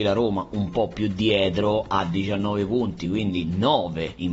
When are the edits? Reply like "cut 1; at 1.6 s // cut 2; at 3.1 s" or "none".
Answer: none